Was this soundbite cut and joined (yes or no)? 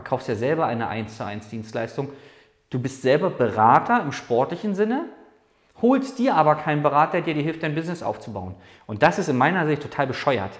no